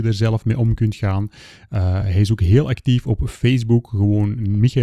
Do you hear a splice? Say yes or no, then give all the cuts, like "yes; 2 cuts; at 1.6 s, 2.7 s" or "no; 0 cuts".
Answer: no; 0 cuts